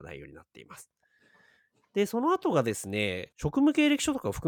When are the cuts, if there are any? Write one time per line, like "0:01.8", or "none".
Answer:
0:03.3